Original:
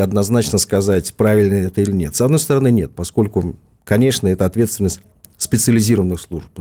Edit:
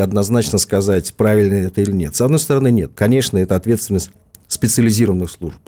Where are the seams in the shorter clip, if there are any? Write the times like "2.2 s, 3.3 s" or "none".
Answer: 2.9 s